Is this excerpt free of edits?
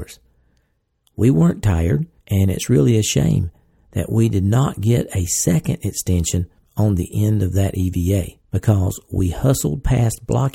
no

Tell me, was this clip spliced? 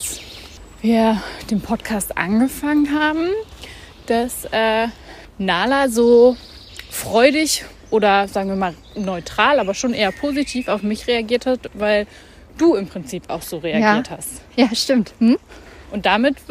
no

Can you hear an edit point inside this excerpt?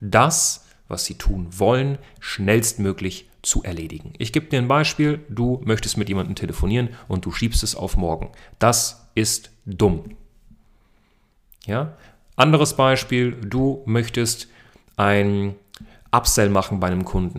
no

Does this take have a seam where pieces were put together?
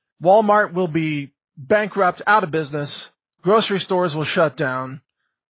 no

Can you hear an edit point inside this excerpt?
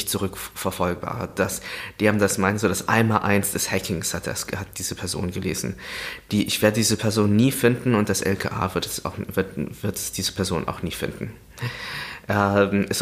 no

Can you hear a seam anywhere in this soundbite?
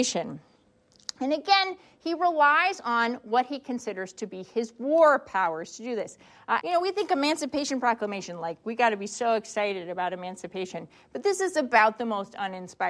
yes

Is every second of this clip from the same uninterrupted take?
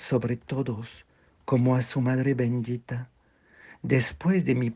yes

